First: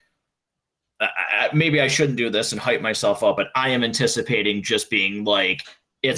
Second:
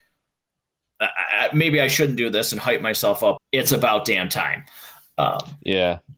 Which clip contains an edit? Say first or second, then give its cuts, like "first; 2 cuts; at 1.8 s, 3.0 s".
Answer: second; 1 cut; at 3.4 s